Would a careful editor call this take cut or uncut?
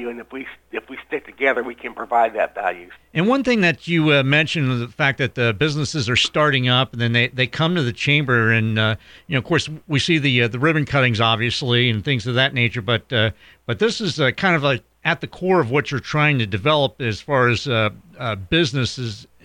cut